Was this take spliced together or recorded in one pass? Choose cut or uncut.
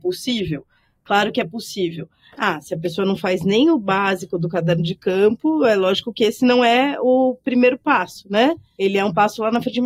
uncut